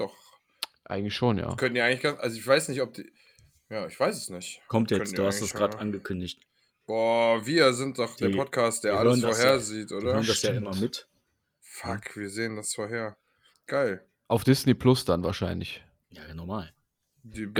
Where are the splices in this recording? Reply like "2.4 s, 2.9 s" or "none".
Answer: 13.5 s